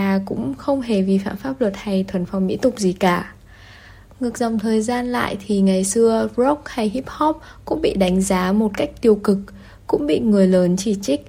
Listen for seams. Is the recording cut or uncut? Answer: uncut